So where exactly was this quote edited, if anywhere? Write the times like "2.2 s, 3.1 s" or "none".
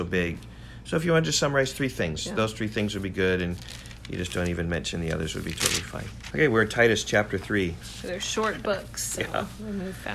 6.3 s, 7.8 s

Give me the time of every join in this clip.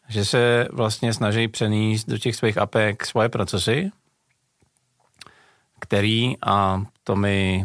none

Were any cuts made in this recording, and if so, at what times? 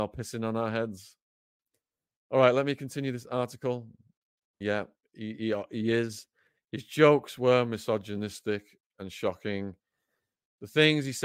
4.6 s

